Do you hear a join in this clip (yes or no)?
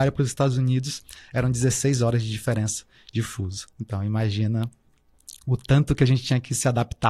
no